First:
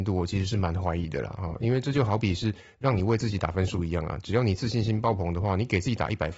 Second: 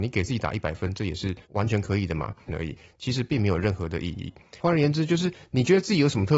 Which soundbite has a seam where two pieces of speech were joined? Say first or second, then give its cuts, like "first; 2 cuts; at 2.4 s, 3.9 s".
second; 2 cuts; at 2.5 s, 4.6 s